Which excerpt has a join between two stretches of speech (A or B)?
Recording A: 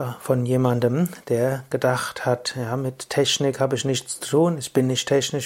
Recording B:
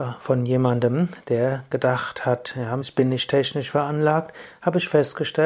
B